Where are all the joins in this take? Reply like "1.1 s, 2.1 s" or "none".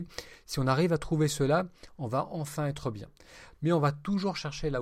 3.5 s